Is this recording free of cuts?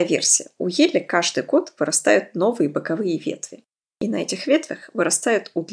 yes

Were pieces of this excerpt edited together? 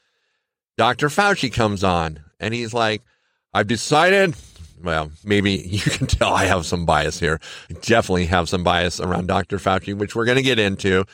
no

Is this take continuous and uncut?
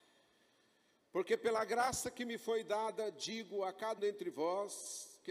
no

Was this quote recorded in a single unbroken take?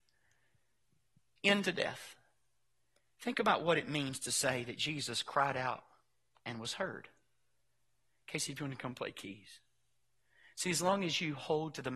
yes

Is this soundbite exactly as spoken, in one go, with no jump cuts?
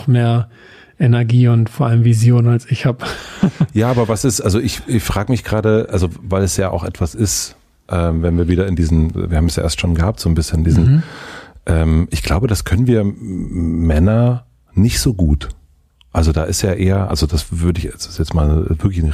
yes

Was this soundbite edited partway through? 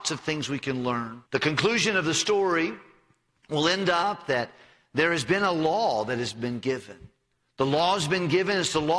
yes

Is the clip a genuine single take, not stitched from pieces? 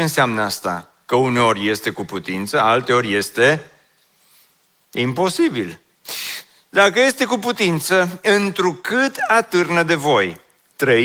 yes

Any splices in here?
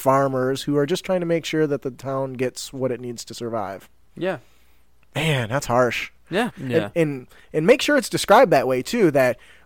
yes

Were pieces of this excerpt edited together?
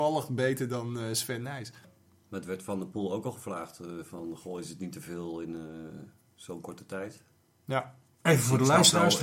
no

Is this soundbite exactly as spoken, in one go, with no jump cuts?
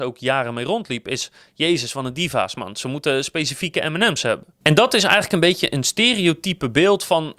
yes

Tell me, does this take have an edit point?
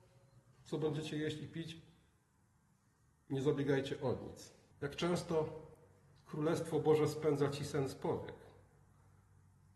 yes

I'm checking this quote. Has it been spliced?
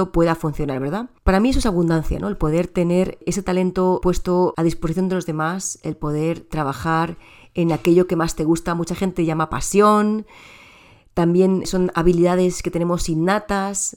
no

